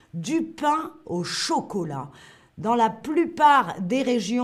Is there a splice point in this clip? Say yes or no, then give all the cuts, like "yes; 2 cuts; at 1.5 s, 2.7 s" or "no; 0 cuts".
no; 0 cuts